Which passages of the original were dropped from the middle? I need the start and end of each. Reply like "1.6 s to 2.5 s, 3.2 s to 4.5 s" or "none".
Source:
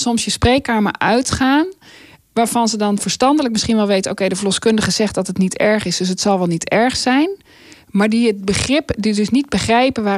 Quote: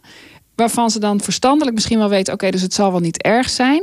4.3 s to 6.0 s